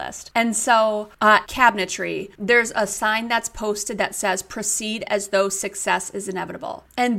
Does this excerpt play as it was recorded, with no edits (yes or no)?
no